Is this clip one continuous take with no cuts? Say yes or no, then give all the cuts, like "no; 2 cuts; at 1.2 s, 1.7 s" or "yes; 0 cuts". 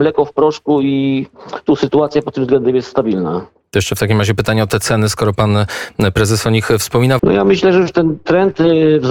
no; 1 cut; at 7.2 s